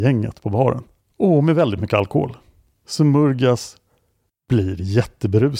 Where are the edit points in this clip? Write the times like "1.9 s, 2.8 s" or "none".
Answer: 1.0 s